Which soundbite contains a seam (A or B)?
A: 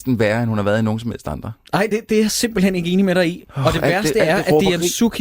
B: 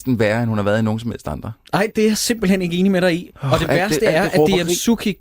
B